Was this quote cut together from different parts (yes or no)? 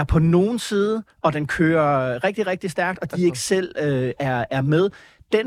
no